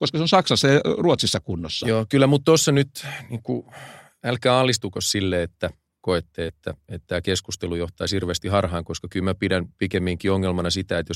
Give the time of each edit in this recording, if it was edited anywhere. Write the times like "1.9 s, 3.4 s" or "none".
none